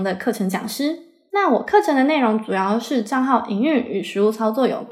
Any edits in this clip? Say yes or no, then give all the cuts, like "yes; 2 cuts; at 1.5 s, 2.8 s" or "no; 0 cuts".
no; 0 cuts